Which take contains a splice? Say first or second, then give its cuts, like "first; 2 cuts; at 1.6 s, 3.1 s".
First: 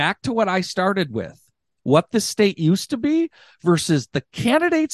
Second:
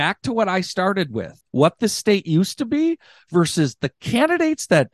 second; 1 cut; at 1.4 s